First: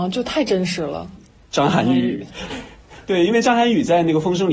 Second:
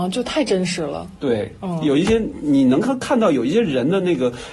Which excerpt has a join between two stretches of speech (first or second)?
first